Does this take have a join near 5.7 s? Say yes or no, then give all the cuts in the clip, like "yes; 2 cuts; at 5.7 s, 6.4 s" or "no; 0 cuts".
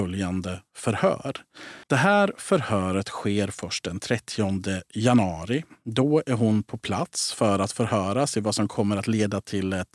no; 1 cut; at 1.8 s